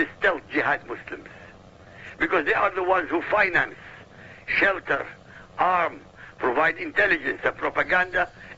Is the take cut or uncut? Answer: uncut